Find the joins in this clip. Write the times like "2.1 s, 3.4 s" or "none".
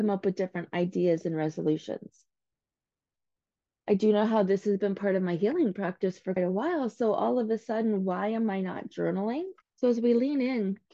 6.4 s, 9.6 s